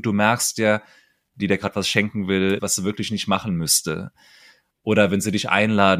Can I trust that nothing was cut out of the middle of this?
no; 2 cuts; at 1.4 s, 2.6 s

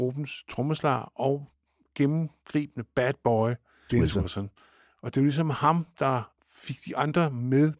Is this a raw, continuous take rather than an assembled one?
no; 2 cuts; at 3.9 s, 6.4 s

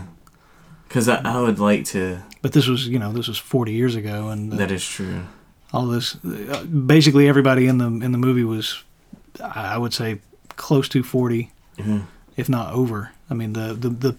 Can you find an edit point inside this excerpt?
no; 0 cuts

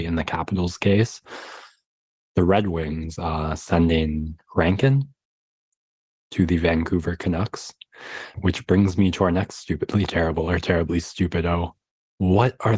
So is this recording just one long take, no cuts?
no; 1 cut; at 8.3 s

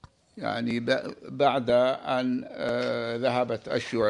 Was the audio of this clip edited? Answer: no; 0 cuts

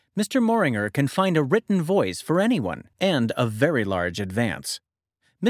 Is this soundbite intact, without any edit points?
no; 1 cut; at 2.9 s

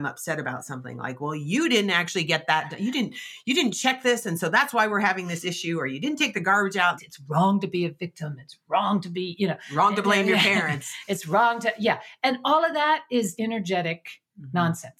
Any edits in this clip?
yes; 2 cuts; at 7.0 s, 13.4 s

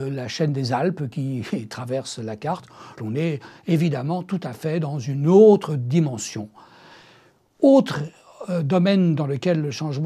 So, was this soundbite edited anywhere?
yes; 1 cut; at 3.0 s

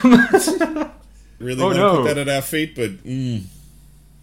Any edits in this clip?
yes; 1 cut; at 1.4 s

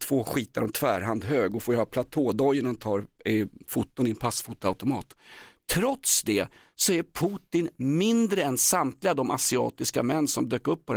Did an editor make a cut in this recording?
no; 0 cuts

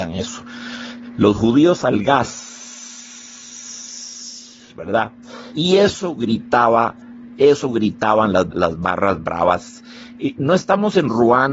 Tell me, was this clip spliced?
yes; 2 cuts; at 5.5 s, 8.5 s

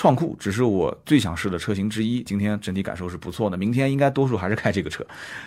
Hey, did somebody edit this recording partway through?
yes; 1 cut; at 2.3 s

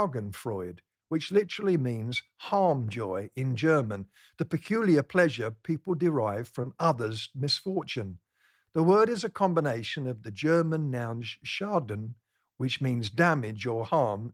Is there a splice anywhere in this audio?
no; 0 cuts

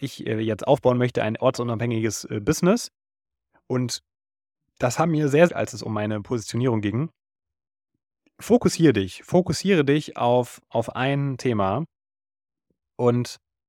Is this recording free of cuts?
no; 1 cut; at 5.5 s

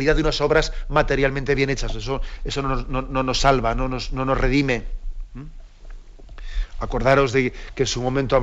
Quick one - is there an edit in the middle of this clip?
no; 0 cuts

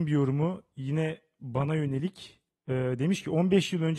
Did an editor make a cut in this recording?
no; 0 cuts

